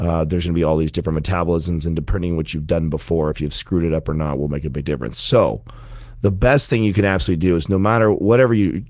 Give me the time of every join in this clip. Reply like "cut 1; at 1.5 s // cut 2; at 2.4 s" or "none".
none

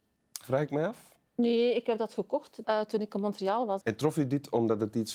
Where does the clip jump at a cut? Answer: cut 1; at 2.6 s // cut 2; at 3.8 s

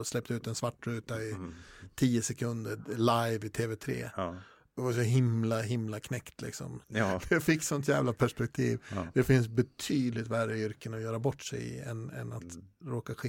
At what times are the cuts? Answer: cut 1; at 6.8 s

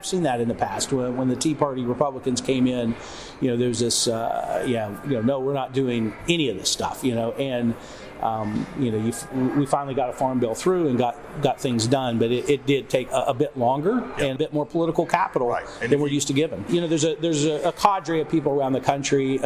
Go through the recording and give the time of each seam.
cut 1; at 13.1 s // cut 2; at 14.4 s // cut 3; at 16.7 s

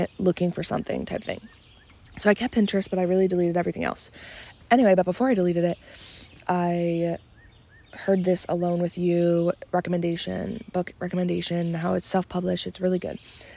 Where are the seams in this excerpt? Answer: none

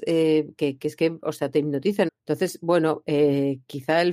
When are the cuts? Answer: cut 1; at 2.1 s

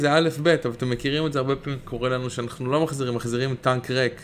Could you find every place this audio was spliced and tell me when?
none

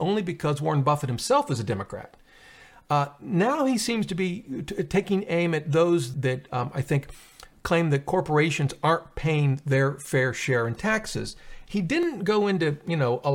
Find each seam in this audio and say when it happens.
cut 1; at 6.1 s // cut 2; at 11.7 s

